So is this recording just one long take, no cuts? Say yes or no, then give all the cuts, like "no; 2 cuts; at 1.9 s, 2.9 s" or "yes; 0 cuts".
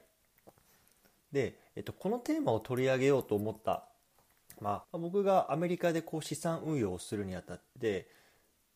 no; 2 cuts; at 1.2 s, 4.8 s